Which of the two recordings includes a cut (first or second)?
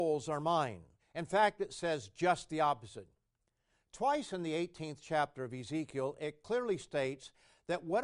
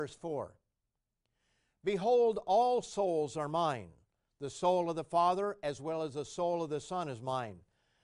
first